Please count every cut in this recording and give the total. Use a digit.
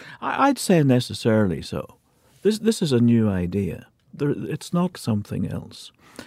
1